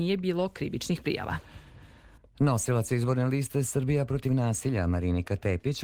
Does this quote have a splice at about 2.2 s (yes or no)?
yes